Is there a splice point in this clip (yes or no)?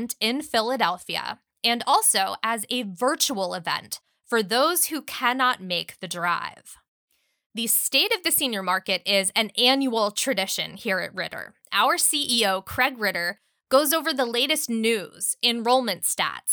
no